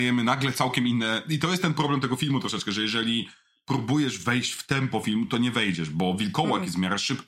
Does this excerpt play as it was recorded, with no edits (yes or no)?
yes